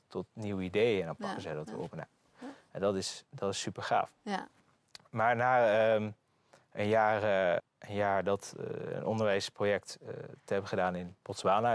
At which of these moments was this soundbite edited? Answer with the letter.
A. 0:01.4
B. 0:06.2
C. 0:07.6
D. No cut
C